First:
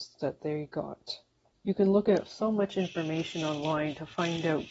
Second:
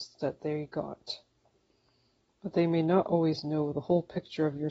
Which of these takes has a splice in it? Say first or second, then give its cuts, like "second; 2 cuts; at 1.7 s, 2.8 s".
first; 1 cut; at 1.5 s